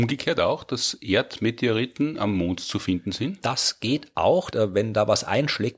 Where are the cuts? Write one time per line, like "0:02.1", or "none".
0:04.5